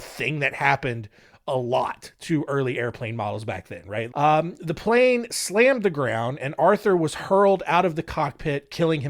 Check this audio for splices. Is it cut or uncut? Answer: cut